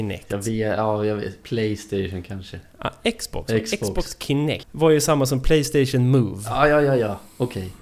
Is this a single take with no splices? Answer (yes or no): no